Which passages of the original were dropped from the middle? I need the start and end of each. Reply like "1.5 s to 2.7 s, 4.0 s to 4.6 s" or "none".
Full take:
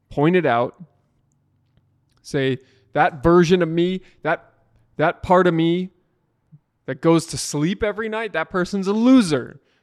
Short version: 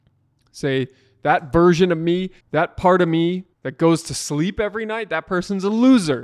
4.1 s to 4.9 s, 6.0 s to 6.8 s